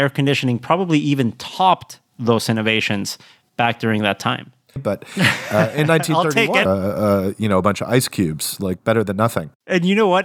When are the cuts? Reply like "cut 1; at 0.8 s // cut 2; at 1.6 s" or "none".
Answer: cut 1; at 4.8 s // cut 2; at 6.6 s